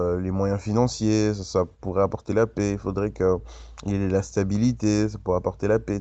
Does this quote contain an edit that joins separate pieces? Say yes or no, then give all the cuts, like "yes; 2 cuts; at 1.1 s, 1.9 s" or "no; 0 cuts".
no; 0 cuts